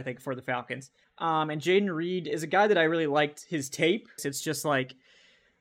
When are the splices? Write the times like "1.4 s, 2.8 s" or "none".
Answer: 1.0 s, 4.2 s